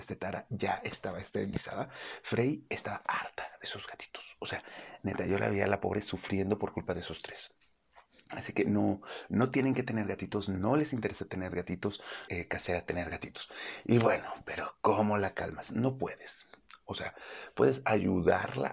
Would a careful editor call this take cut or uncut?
cut